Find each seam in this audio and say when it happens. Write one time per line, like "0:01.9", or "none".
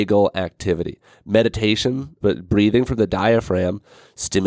0:02.2